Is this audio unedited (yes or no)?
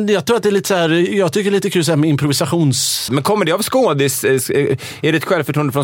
no